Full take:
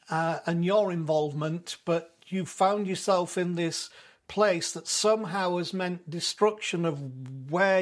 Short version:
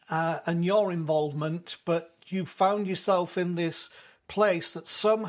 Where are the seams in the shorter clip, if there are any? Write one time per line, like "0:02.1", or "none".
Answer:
none